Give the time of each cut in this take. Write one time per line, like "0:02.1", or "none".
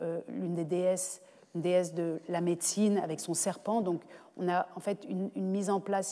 none

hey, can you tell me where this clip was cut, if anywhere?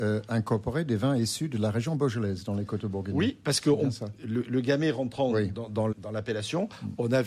0:05.9

